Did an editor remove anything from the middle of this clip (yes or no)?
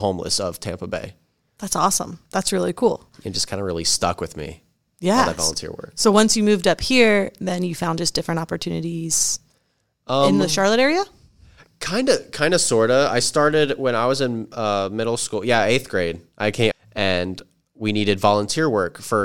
yes